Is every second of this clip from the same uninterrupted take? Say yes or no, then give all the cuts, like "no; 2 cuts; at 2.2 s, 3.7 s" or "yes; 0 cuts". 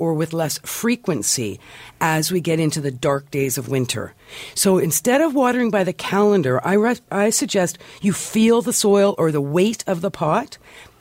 yes; 0 cuts